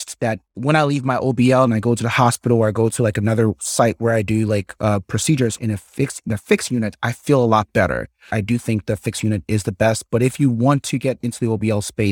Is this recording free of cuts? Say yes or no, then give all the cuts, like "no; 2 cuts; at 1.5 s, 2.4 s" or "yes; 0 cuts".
no; 1 cut; at 8.3 s